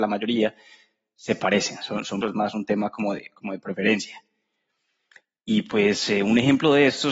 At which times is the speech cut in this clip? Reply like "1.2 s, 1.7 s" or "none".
2.2 s